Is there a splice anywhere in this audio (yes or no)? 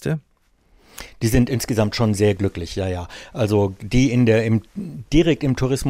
no